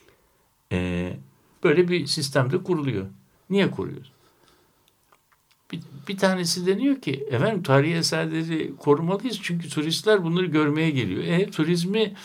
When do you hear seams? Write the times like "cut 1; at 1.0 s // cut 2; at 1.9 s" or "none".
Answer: cut 1; at 3.3 s

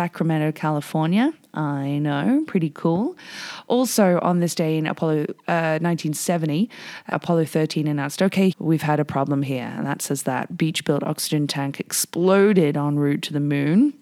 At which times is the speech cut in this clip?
cut 1; at 7.1 s // cut 2; at 8.5 s

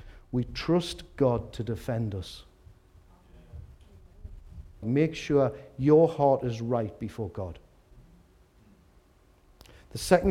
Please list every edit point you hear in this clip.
cut 1; at 4.8 s

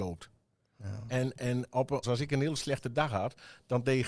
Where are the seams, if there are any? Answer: cut 1; at 2.0 s

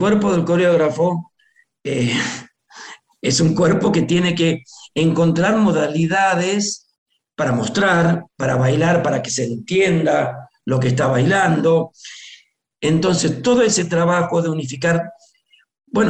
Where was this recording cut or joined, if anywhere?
cut 1; at 12.7 s

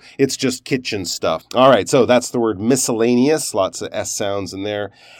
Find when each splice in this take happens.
cut 1; at 1.4 s

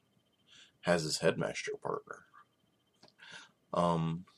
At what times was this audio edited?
cut 1; at 3.0 s

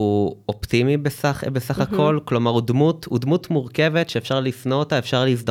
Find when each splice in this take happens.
none

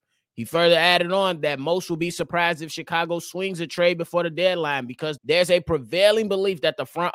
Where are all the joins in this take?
cut 1; at 5.2 s

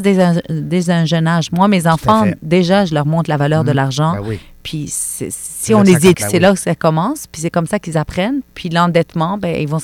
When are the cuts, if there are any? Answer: cut 1; at 6.1 s // cut 2; at 8.4 s

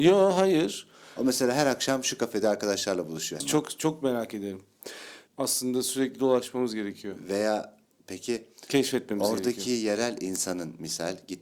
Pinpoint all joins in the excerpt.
cut 1; at 3.4 s // cut 2; at 5.3 s

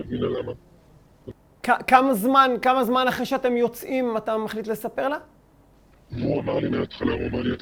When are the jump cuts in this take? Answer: cut 1; at 5.9 s

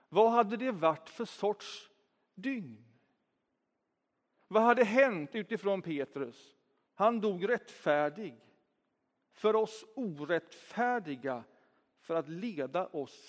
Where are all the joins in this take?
cut 1; at 6.9 s

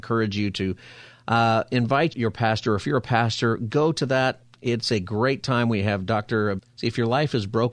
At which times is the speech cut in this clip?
cut 1; at 2.1 s // cut 2; at 6.6 s

